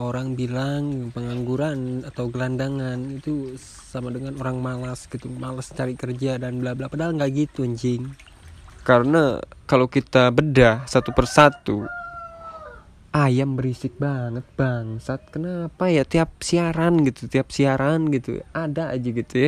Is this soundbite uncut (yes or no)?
no